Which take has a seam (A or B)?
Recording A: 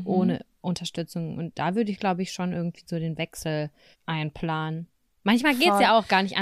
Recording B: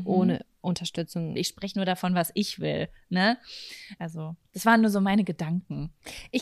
B